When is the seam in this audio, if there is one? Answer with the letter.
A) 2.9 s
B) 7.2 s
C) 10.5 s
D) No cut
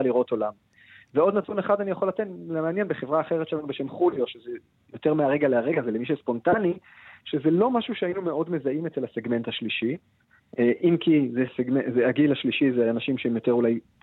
D